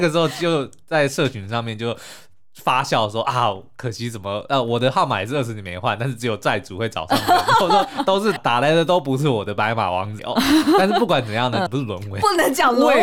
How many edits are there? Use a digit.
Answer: 3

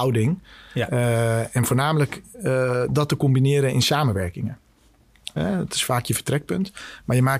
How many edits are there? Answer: 1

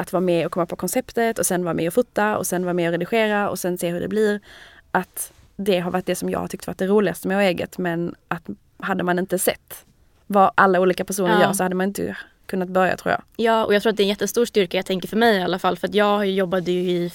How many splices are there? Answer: 0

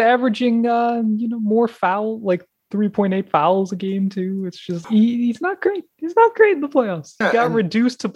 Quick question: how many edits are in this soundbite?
2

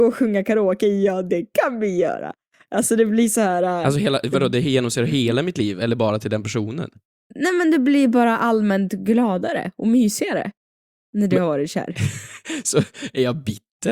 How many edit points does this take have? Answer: 0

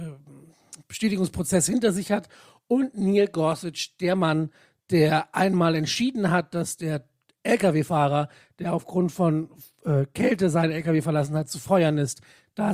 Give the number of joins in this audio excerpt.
0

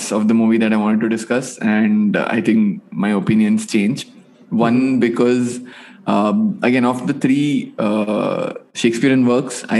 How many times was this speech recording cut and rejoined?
0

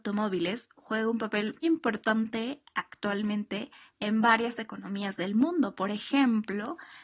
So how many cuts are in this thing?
1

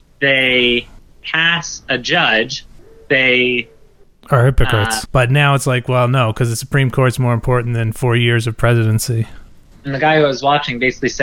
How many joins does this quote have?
2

